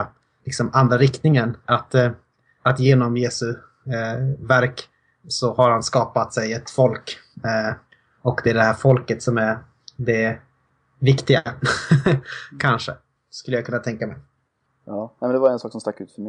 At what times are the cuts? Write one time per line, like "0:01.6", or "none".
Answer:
none